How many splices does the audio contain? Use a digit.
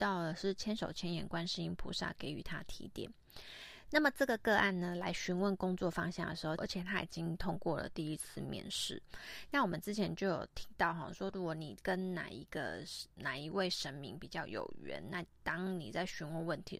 2